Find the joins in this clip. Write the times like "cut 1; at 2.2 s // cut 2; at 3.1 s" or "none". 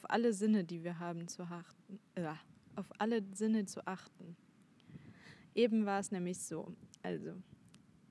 cut 1; at 3.7 s